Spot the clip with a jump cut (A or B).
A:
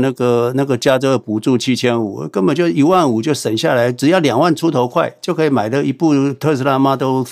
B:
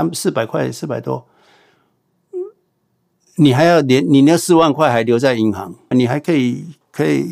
B